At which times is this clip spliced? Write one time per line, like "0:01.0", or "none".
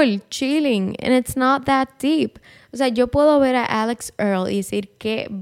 none